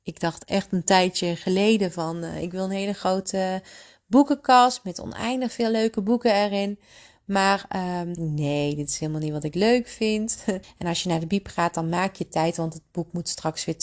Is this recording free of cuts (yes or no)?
no